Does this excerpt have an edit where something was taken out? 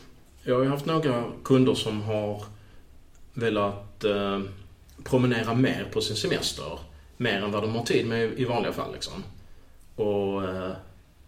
no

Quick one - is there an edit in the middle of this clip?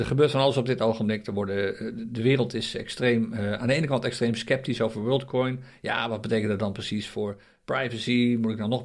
no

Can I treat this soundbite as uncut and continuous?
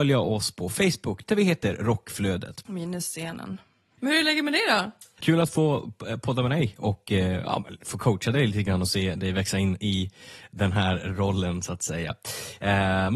no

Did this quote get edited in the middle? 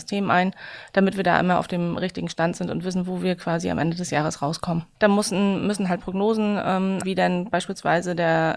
yes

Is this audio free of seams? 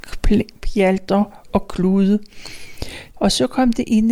no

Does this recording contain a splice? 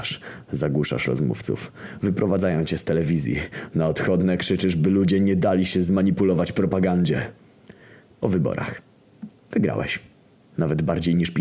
no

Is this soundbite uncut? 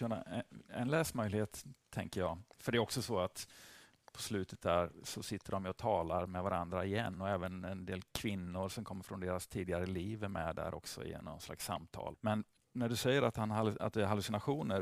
no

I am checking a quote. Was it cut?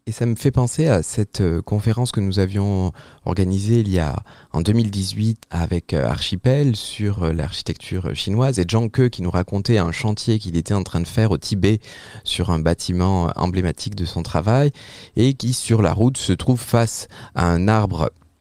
yes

